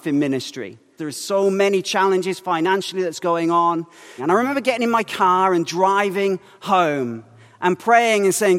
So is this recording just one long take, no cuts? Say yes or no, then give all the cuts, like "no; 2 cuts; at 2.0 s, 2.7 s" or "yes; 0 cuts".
no; 2 cuts; at 1.0 s, 4.2 s